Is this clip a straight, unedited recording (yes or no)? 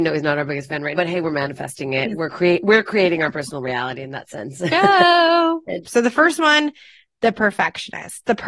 no